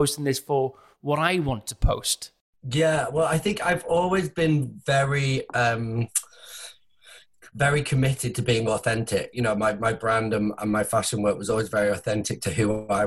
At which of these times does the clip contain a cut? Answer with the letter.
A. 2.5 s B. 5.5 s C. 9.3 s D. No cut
C